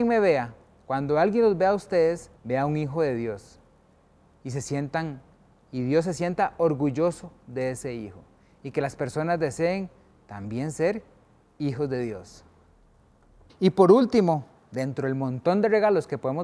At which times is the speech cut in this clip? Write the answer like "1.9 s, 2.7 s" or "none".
2.4 s, 13.5 s